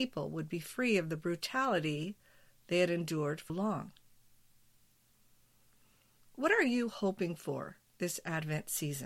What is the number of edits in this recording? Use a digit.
1